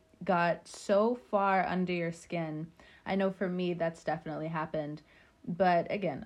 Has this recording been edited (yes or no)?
no